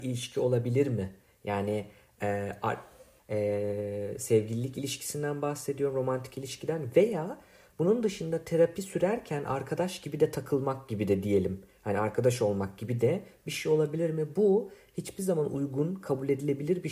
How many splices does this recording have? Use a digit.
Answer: 1